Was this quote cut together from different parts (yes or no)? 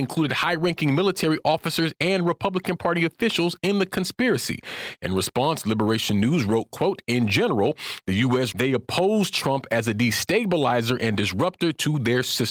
yes